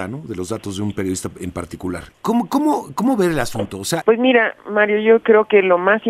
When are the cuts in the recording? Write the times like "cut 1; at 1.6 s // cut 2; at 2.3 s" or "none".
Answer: cut 1; at 2.1 s // cut 2; at 4.0 s